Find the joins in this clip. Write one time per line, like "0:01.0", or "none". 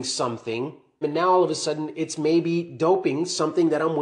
0:01.0